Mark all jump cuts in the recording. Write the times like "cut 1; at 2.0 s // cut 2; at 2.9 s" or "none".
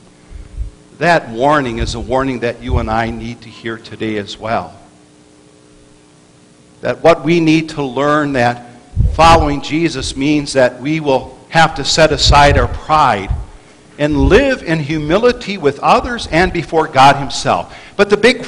none